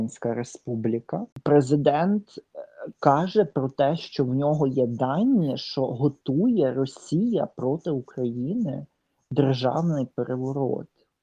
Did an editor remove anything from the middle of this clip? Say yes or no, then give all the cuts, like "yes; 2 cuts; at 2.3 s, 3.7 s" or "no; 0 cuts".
yes; 1 cut; at 1.3 s